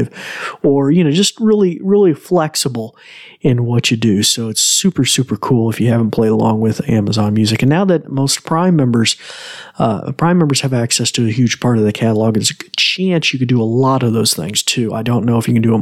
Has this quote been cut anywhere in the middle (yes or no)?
no